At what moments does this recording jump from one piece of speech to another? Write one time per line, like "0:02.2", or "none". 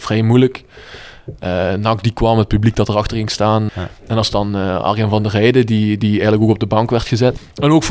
0:03.7